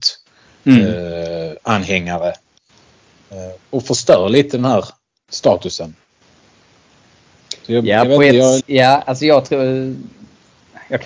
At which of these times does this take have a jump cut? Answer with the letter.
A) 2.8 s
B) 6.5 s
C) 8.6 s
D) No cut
C